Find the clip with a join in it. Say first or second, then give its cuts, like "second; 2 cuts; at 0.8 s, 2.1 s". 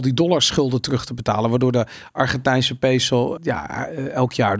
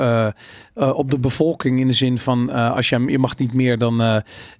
first; 1 cut; at 3.4 s